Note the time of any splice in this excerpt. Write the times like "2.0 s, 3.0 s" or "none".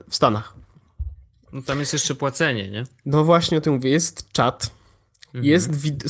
none